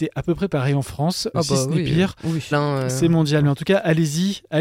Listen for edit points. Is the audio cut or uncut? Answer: cut